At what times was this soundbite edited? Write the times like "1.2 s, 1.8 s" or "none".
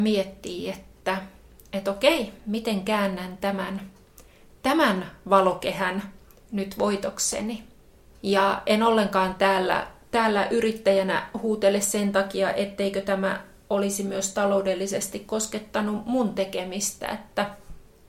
none